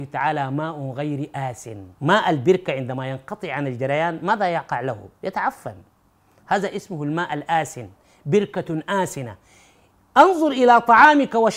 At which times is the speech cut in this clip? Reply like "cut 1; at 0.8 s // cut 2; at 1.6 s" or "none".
cut 1; at 1.9 s